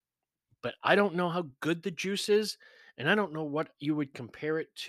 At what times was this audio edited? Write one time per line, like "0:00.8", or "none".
none